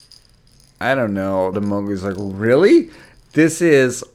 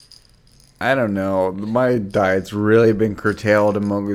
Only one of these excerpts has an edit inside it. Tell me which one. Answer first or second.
first